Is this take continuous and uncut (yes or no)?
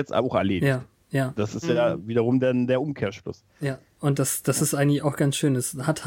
yes